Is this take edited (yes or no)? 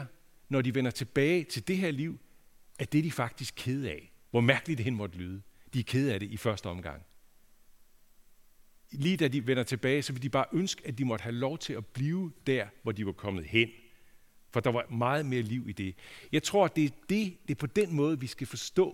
no